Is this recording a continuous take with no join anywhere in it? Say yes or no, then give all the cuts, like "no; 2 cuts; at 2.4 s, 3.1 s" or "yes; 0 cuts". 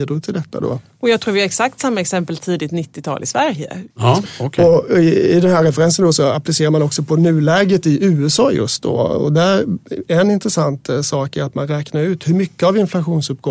no; 1 cut; at 3.9 s